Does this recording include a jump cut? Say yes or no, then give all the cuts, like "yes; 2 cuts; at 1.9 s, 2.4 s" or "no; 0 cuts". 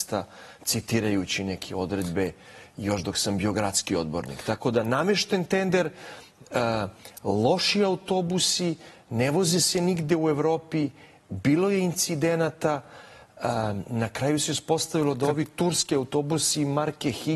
no; 0 cuts